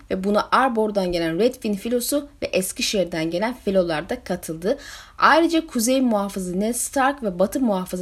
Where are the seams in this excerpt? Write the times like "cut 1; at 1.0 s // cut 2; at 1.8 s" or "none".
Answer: none